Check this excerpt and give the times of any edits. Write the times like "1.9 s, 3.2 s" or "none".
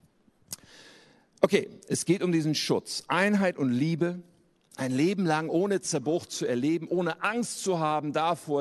none